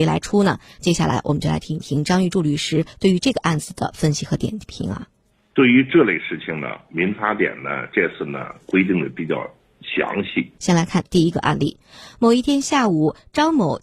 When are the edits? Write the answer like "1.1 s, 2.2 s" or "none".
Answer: 10.6 s

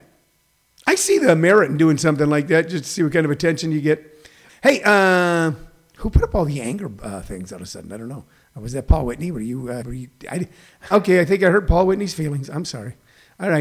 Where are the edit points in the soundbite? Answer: 4.5 s, 9.8 s, 10.9 s

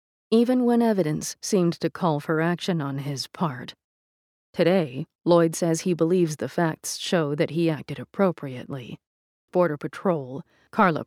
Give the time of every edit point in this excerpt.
9.5 s

